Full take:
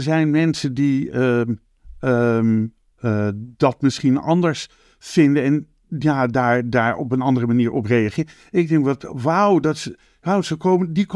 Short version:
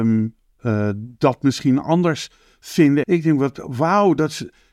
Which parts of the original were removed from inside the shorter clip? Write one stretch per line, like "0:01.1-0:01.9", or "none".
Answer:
0:05.4-0:08.5